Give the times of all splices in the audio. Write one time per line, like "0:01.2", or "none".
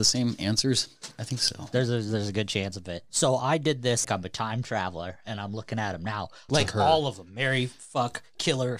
0:04.0
0:06.5